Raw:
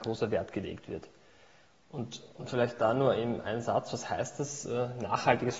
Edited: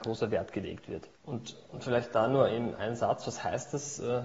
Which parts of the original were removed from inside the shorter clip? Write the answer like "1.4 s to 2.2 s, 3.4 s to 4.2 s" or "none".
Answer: 1.1 s to 1.8 s